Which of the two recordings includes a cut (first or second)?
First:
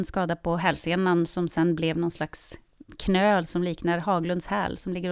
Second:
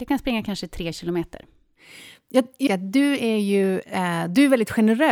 second